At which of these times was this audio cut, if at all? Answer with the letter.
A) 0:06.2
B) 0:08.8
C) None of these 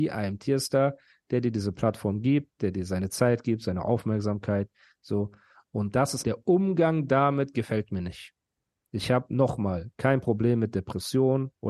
A